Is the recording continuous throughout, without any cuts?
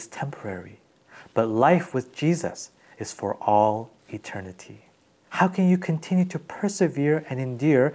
no; 1 cut; at 5.3 s

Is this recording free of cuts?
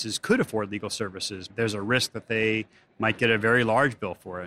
no; 1 cut; at 1.5 s

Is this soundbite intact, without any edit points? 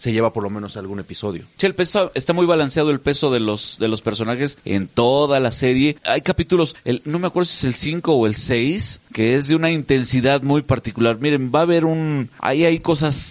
yes; 0 cuts

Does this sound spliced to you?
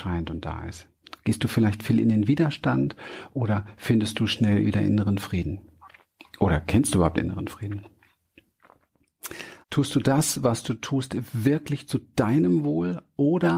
yes; 1 cut; at 9.6 s

